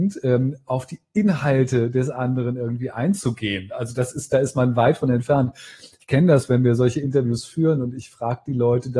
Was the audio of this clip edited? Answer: no; 0 cuts

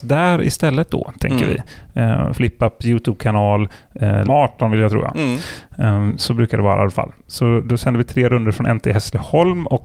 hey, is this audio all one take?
no; 2 cuts; at 2.3 s, 4.2 s

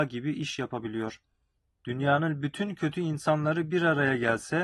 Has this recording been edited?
yes; 1 cut; at 1.8 s

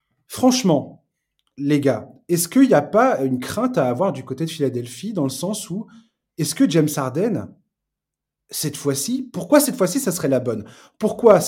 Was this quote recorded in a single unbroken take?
yes; 0 cuts

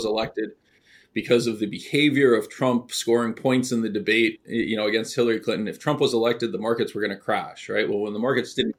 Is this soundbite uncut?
no; 1 cut; at 4.4 s

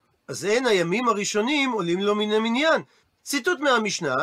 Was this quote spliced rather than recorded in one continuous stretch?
yes; 1 cut; at 3.0 s

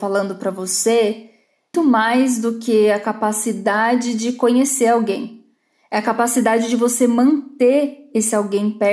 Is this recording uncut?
no; 1 cut; at 1.7 s

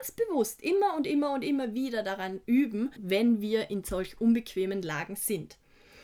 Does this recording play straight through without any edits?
no; 1 cut; at 3.0 s

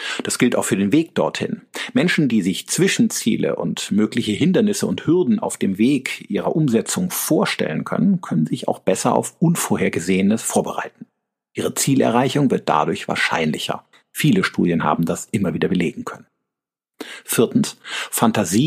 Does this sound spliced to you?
no; 0 cuts

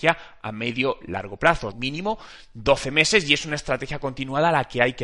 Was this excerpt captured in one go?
no; 1 cut; at 1.7 s

